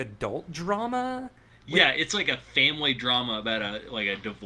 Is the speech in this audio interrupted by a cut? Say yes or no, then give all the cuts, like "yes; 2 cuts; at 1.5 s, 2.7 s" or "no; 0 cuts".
no; 0 cuts